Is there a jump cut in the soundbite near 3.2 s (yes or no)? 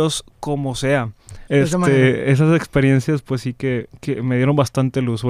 no